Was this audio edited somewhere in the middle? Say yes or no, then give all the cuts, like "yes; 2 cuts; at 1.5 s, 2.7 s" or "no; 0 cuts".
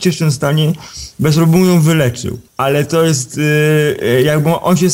yes; 1 cut; at 2.5 s